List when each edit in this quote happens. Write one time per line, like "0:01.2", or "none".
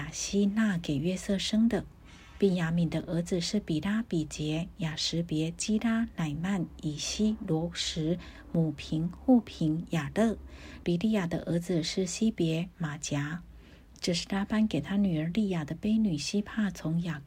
0:10.8